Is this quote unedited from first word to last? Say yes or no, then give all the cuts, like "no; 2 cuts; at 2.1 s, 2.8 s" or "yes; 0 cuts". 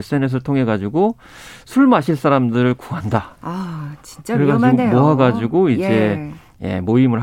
yes; 0 cuts